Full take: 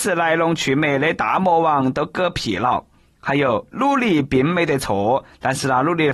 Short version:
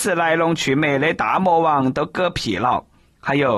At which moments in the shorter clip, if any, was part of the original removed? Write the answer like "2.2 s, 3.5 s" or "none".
none

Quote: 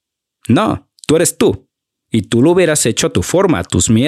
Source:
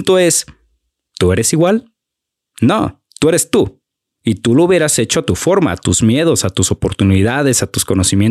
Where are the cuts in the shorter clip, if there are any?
none

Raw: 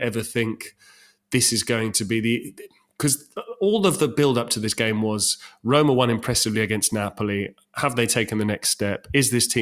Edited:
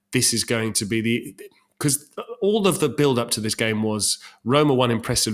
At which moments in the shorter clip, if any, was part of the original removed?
none

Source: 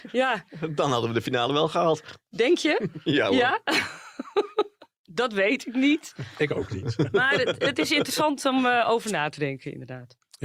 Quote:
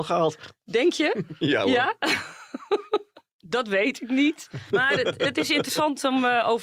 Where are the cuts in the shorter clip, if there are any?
4.7 s

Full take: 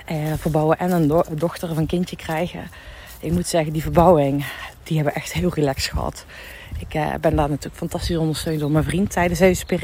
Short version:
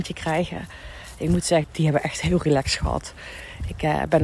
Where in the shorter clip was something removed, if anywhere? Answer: 1.6 s

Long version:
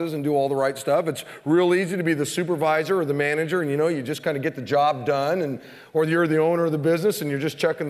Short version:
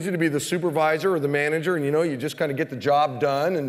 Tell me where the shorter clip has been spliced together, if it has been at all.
none

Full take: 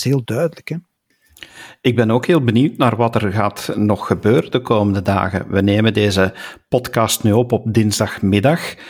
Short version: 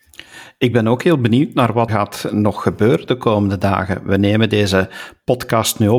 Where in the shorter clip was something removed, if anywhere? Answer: 1.9 s

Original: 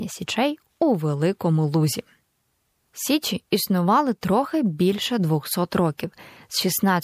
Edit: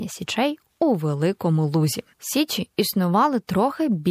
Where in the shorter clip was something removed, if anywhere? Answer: 2.1 s

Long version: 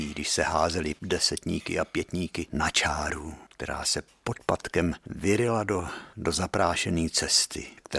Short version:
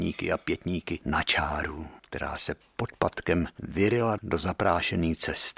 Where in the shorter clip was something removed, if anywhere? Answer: 4.2 s

